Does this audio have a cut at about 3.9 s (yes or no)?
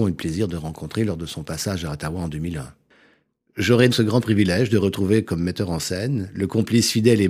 yes